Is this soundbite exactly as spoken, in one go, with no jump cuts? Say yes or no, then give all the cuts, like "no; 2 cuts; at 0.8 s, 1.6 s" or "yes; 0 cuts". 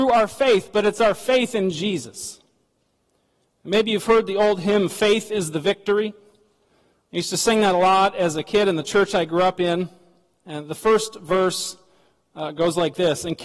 yes; 0 cuts